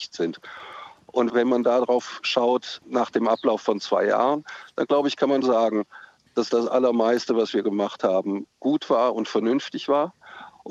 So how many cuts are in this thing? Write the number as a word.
one